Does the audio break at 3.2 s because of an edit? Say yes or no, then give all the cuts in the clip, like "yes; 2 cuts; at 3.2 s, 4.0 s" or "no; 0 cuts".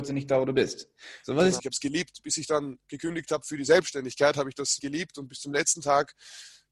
no; 2 cuts; at 1.6 s, 4.8 s